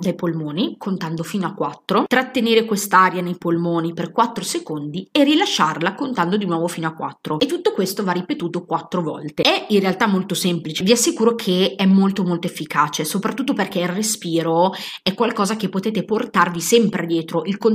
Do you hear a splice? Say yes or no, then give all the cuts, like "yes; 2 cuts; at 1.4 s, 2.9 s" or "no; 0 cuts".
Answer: no; 0 cuts